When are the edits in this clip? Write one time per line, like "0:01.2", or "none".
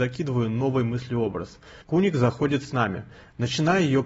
0:01.8